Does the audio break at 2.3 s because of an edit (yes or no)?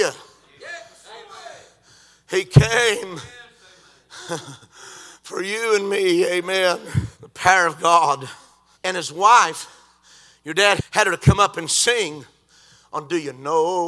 no